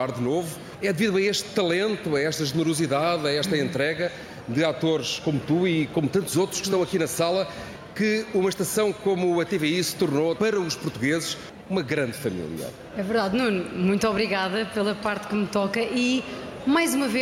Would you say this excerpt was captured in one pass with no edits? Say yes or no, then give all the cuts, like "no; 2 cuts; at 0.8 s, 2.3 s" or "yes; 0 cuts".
no; 1 cut; at 10.4 s